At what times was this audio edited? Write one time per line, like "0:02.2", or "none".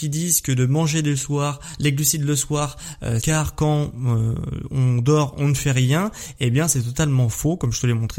0:03.2